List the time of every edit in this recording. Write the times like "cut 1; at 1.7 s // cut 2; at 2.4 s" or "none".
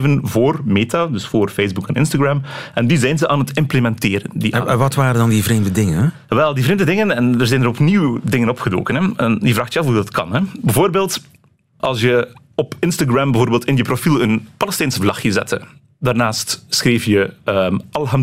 cut 1; at 11.8 s

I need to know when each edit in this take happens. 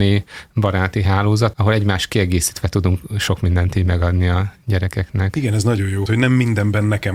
cut 1; at 1.5 s // cut 2; at 6.1 s

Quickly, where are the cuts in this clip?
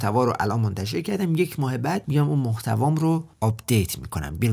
cut 1; at 3.3 s

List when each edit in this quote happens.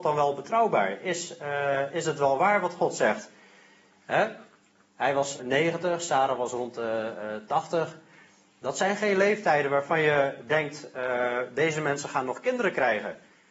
cut 1; at 5.4 s

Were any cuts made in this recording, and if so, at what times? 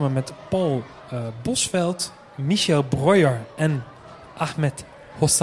none

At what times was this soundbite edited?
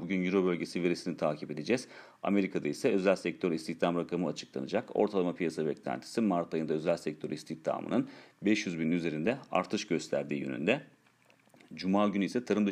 none

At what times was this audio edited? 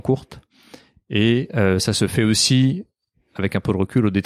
none

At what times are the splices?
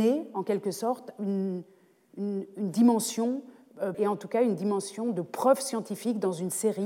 cut 1; at 3.9 s

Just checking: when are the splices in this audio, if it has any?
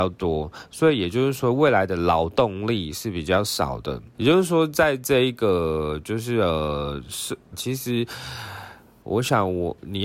cut 1; at 4.1 s // cut 2; at 7.5 s // cut 3; at 9.0 s

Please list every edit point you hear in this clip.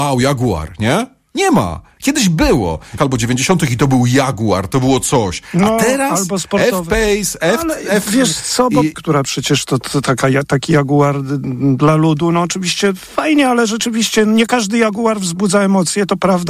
cut 1; at 3.0 s // cut 2; at 8.9 s

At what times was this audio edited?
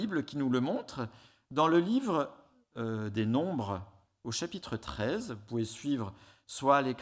none

